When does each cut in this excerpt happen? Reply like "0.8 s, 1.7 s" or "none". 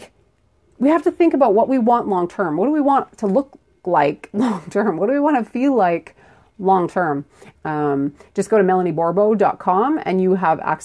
7.6 s